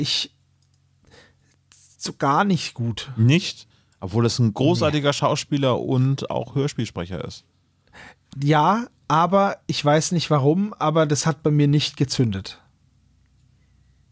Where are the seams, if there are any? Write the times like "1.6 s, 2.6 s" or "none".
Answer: none